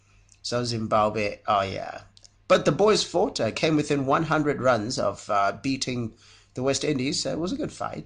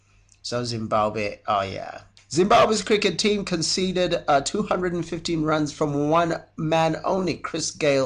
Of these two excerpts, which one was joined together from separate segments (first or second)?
second